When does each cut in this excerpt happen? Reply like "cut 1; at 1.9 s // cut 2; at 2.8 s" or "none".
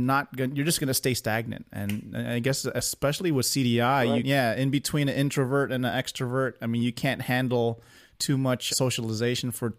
cut 1; at 4.2 s // cut 2; at 8.7 s